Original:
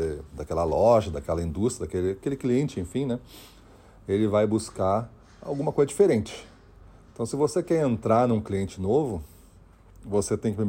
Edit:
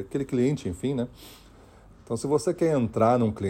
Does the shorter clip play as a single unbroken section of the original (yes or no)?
no